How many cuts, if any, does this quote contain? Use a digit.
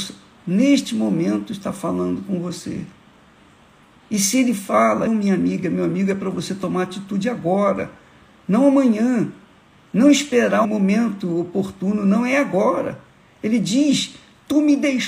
2